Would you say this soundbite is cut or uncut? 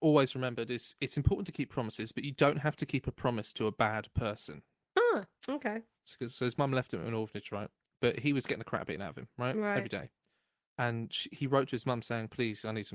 cut